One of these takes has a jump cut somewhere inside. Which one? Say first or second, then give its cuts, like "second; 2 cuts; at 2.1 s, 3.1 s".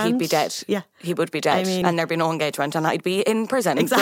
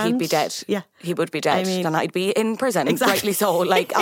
second; 1 cut; at 1.8 s